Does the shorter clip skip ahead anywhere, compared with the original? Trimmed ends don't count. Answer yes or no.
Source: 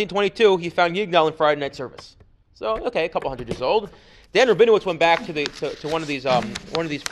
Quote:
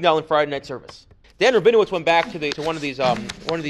yes